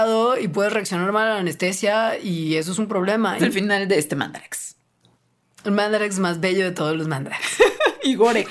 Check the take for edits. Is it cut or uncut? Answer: cut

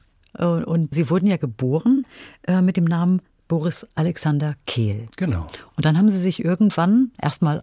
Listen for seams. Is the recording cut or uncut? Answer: cut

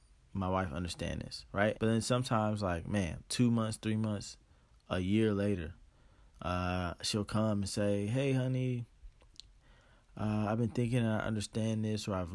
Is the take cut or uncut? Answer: cut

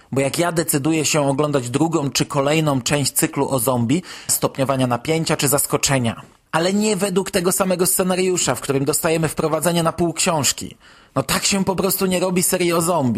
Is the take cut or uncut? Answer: cut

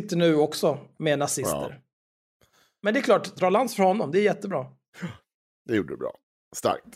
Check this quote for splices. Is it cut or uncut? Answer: cut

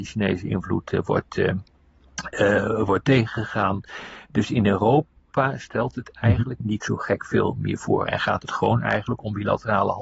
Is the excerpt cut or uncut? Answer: cut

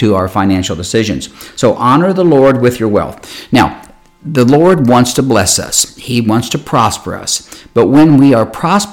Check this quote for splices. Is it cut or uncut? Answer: uncut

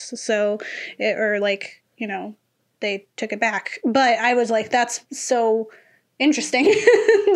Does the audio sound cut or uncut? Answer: uncut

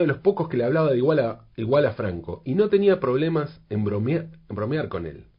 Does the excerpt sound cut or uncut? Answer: uncut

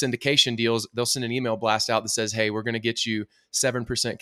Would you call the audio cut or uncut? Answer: uncut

